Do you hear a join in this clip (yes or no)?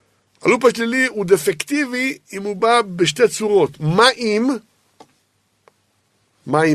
no